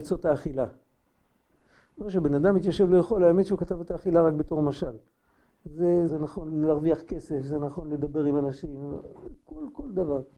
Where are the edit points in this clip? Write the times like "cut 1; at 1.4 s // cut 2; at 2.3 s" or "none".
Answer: cut 1; at 6.1 s